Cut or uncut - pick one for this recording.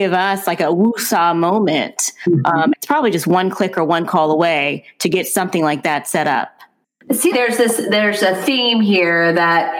cut